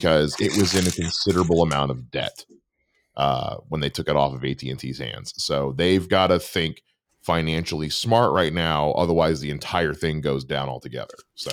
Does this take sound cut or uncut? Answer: uncut